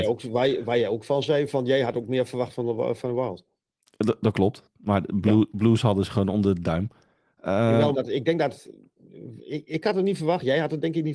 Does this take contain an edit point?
yes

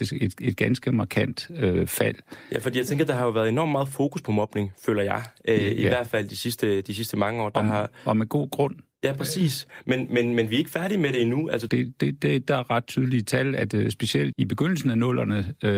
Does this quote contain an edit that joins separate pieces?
yes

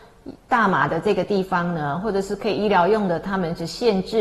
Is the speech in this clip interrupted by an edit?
no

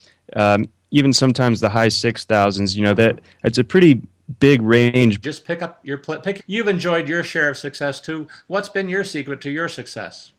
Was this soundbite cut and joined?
yes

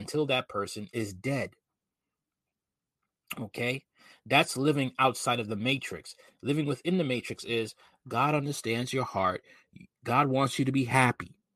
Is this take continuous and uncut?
yes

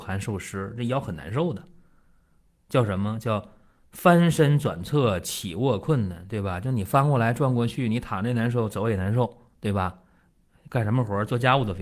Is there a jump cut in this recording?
no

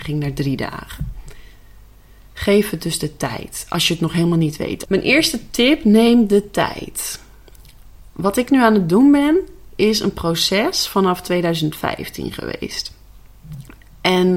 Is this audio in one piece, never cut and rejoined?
no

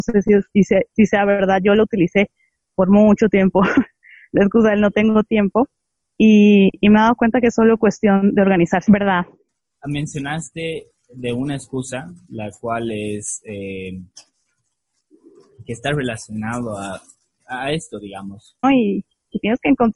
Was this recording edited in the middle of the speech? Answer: yes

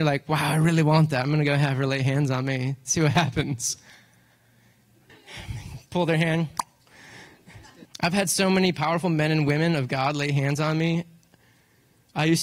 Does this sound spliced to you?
yes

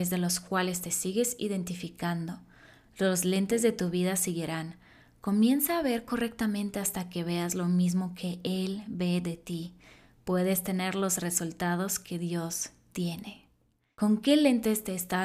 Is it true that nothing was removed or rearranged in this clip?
no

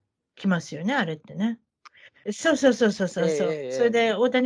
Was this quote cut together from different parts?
yes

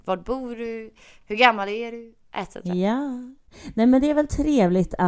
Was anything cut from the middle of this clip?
no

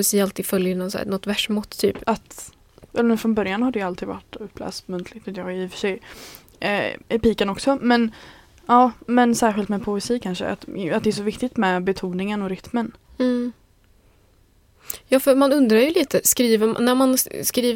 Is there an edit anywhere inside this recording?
yes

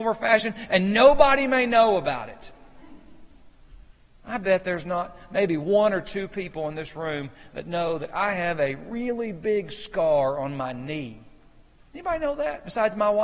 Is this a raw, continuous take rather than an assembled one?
yes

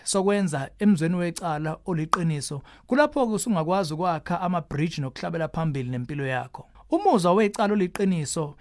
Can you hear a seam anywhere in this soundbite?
yes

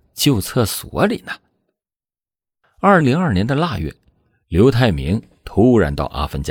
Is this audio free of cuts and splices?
no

